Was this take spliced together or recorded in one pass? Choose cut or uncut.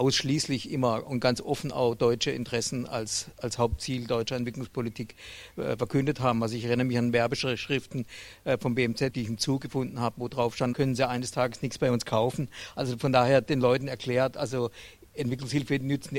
cut